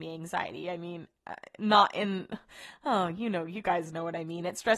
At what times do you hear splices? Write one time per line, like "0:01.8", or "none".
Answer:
none